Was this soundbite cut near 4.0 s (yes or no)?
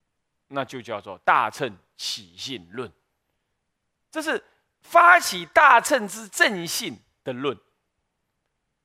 no